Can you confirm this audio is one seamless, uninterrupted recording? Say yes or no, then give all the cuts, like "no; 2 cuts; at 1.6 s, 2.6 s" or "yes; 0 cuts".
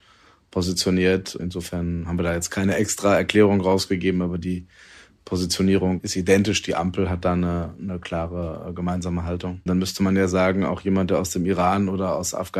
no; 1 cut; at 9.7 s